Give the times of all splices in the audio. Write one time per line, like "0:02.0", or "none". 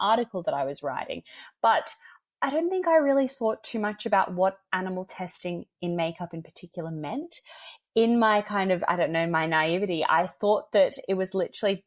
none

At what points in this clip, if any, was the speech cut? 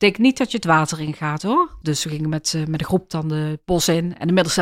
0:01.8

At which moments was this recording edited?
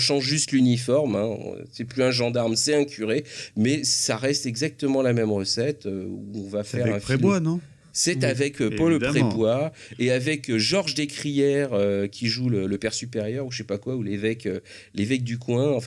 none

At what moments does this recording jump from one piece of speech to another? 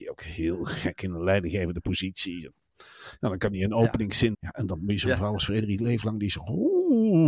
0:04.3

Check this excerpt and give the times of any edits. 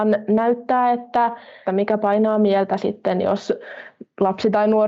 0:01.6

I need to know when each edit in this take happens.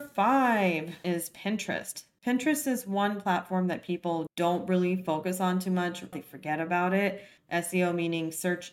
0:06.1
0:07.4

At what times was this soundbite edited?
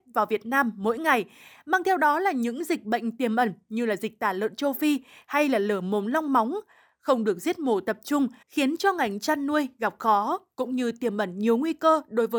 0:08.4

